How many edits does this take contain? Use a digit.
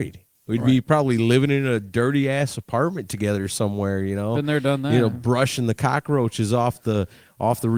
0